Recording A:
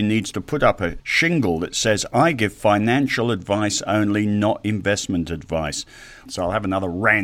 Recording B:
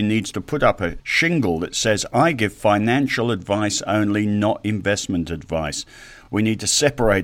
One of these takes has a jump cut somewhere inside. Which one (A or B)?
A